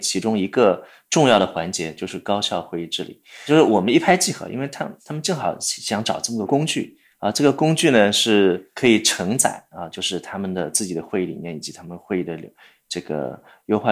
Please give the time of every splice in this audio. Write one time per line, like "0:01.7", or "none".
none